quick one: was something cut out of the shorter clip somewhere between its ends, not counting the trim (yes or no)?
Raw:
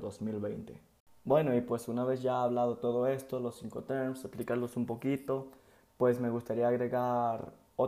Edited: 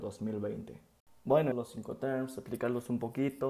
yes